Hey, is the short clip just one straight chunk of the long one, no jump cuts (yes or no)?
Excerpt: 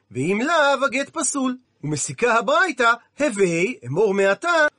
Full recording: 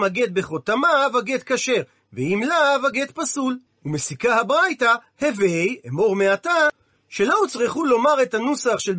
yes